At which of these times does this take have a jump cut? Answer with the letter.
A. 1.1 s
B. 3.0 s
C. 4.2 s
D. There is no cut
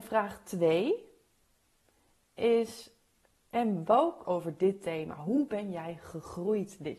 C